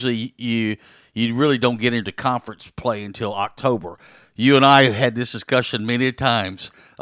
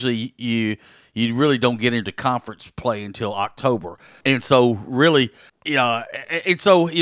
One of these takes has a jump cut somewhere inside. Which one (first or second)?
second